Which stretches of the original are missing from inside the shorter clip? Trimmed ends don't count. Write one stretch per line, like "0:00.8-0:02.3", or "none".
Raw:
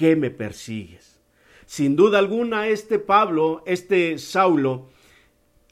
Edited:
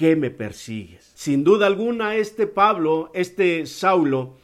0:01.1-0:01.6